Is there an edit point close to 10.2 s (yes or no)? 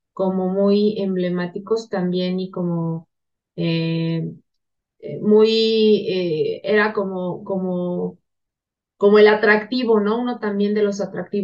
no